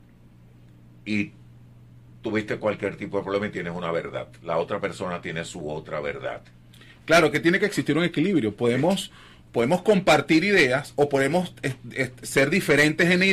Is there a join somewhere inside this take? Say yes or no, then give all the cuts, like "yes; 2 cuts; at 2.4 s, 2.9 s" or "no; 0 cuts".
no; 0 cuts